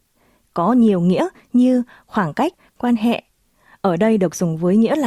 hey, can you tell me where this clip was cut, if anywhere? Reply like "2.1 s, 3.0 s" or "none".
2.7 s